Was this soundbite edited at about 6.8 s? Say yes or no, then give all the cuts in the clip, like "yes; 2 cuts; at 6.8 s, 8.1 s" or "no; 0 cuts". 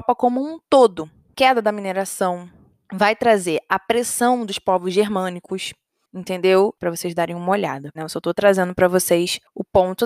yes; 3 cuts; at 1.3 s, 6.8 s, 8.0 s